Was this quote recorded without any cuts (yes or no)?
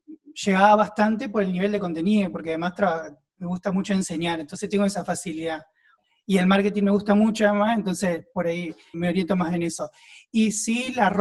no